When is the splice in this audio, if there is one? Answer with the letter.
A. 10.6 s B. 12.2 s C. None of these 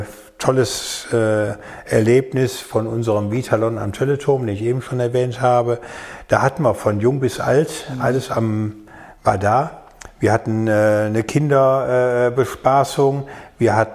C